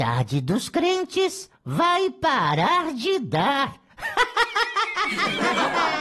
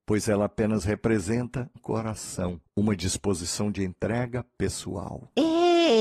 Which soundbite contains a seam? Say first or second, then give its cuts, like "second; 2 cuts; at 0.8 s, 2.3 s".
second; 1 cut; at 1.8 s